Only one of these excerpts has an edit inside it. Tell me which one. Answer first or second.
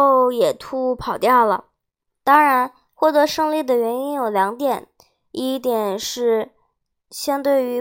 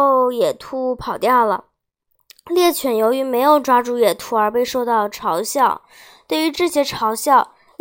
first